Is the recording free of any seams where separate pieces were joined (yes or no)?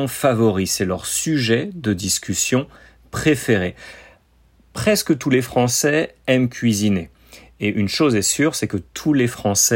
yes